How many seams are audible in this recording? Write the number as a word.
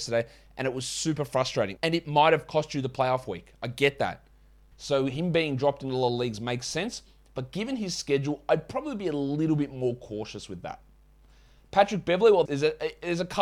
three